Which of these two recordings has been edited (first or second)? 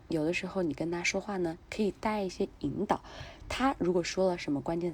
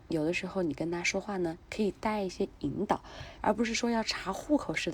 second